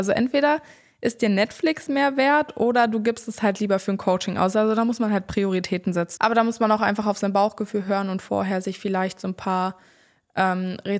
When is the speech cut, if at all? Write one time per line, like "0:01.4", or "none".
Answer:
0:06.2